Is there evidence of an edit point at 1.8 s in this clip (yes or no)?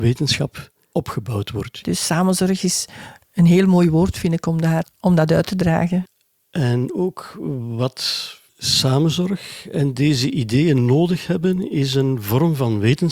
yes